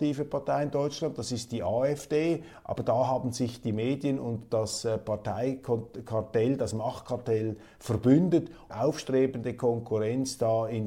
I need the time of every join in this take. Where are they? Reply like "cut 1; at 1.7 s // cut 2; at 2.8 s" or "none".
cut 1; at 8.7 s